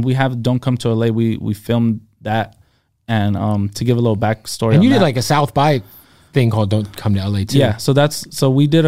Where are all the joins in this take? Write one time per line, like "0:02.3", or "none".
none